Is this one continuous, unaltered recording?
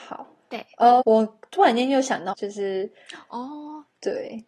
no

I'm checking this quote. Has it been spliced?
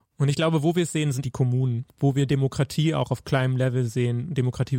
yes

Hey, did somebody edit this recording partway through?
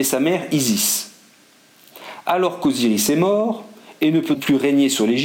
yes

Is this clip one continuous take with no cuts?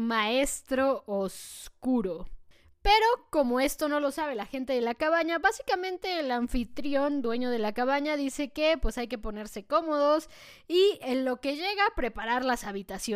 yes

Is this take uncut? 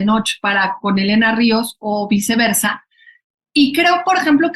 yes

